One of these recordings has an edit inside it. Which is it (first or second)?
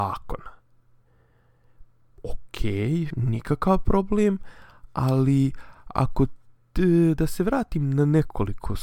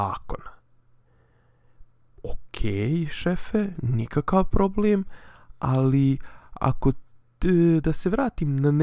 first